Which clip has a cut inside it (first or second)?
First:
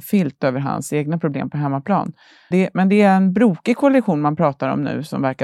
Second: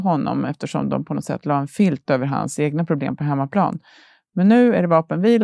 first